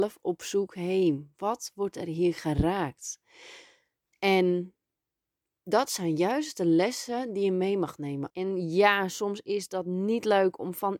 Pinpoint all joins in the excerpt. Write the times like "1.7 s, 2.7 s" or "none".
4.0 s, 8.3 s